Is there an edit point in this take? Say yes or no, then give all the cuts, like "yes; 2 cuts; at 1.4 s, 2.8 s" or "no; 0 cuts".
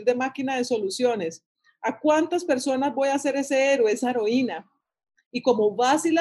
no; 0 cuts